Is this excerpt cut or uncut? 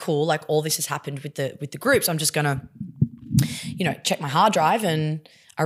uncut